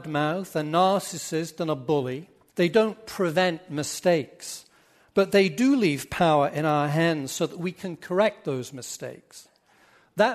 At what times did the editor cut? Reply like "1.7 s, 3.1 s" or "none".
2.5 s